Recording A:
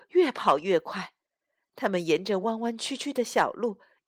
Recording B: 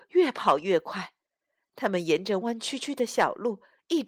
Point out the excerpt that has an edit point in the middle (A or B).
B